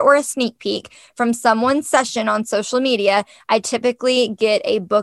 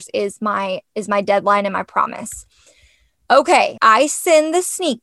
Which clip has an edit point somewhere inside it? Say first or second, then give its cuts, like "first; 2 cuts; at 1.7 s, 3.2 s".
second; 1 cut; at 3.8 s